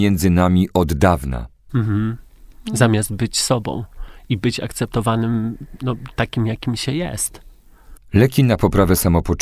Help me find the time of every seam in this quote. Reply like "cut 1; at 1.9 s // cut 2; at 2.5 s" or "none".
cut 1; at 1.7 s // cut 2; at 8.0 s